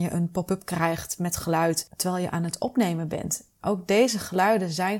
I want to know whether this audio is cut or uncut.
uncut